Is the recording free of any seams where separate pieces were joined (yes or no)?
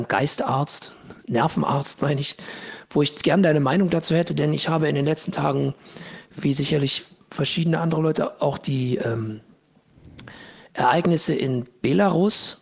yes